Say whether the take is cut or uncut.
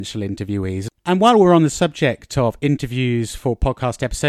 uncut